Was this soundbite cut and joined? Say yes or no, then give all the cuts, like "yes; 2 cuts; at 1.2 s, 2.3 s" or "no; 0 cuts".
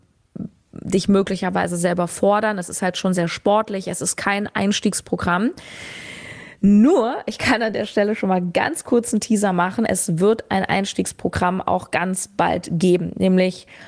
no; 0 cuts